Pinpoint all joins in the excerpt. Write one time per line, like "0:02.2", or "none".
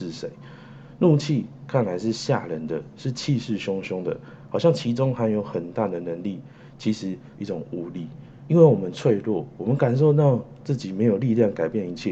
0:07.3